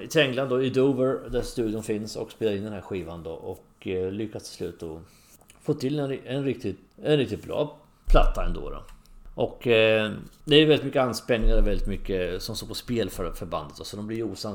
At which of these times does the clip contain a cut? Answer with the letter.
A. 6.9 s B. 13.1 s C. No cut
A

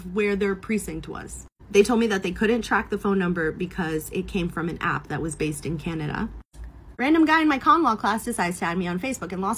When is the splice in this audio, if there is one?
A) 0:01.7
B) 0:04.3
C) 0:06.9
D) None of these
C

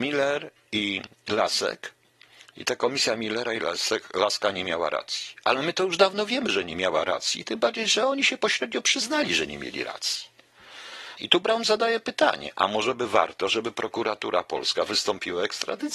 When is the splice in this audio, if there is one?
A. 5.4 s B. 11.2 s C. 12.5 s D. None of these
B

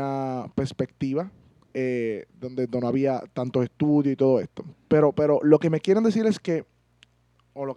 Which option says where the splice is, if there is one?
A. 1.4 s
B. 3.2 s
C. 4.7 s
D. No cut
C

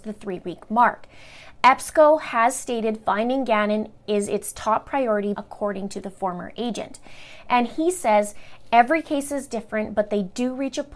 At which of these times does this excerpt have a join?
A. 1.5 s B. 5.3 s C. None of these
B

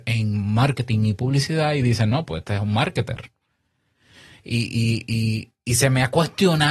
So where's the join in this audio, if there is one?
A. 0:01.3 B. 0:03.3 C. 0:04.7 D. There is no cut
D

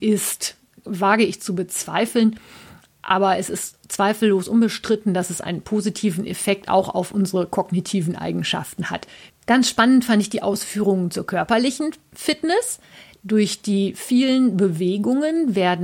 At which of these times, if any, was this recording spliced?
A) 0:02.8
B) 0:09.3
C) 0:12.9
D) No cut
B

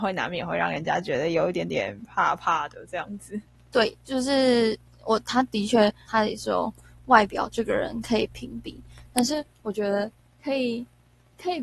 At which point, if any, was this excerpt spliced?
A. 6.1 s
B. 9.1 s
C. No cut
A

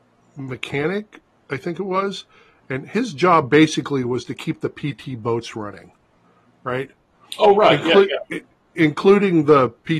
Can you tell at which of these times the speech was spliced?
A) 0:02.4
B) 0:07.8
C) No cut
C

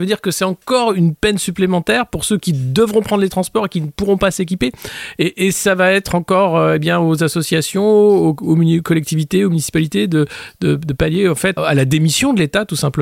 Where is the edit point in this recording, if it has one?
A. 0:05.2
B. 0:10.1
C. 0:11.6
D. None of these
C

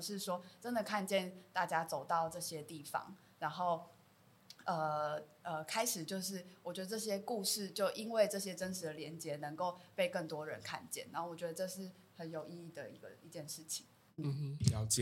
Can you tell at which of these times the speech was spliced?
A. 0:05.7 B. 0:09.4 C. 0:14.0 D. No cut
D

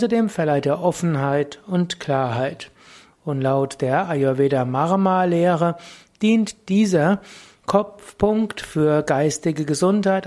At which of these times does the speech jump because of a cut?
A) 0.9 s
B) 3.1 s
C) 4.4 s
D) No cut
B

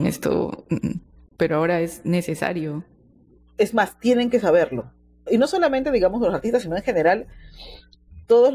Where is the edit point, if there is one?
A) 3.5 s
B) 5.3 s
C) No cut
B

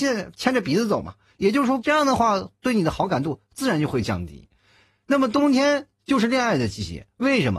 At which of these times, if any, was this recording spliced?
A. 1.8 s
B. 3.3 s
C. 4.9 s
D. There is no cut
A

